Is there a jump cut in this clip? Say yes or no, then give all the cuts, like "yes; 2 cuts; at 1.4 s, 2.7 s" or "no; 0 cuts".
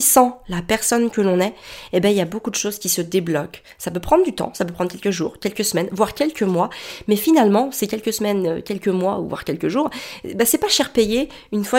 no; 0 cuts